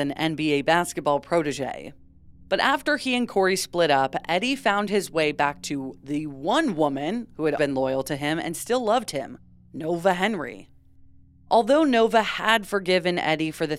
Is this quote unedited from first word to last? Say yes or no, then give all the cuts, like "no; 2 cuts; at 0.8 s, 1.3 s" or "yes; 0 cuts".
no; 1 cut; at 7.6 s